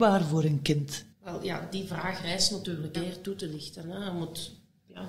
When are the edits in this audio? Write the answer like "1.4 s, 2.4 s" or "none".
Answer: 1.1 s, 2.9 s